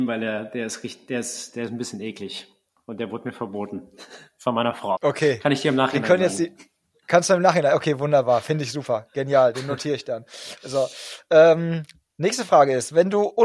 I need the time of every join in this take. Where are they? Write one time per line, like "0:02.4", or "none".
0:05.0

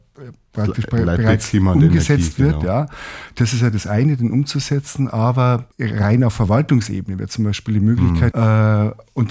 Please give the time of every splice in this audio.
0:05.7
0:08.3

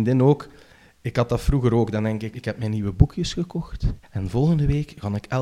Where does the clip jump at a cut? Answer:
0:02.3
0:04.0

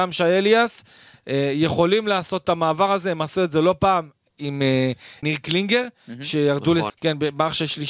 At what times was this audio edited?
0:05.2
0:06.9

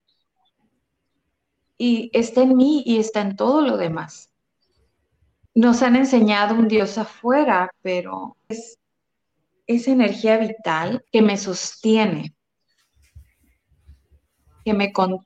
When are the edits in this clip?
0:05.5
0:08.5
0:11.1

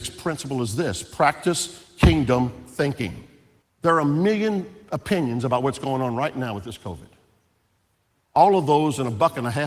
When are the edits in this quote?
0:03.6

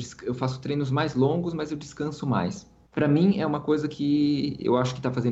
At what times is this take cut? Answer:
0:02.9

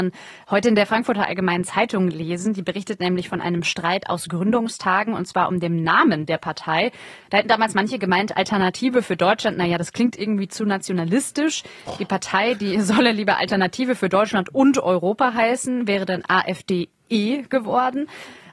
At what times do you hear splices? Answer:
none

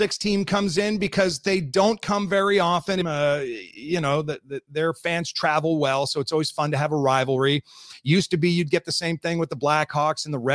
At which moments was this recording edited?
0:03.0

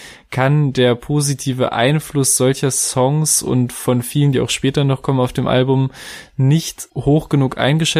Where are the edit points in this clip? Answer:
none

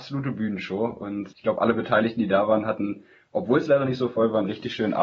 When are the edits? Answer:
0:01.3

